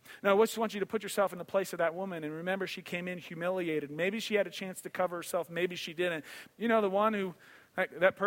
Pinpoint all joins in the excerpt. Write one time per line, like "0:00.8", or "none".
0:06.5